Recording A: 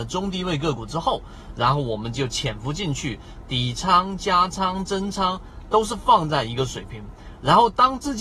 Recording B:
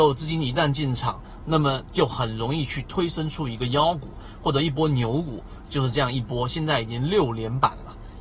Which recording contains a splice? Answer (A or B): B